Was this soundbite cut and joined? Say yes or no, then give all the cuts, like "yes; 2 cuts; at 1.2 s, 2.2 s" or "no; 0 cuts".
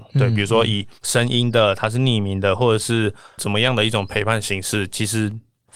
yes; 2 cuts; at 0.9 s, 2.6 s